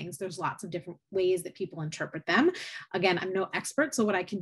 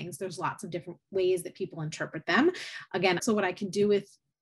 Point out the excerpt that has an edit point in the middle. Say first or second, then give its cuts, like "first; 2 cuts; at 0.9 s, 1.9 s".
second; 1 cut; at 3.2 s